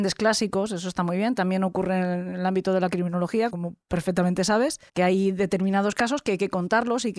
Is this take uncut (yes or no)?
no